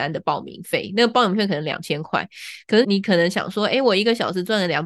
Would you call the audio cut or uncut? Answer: cut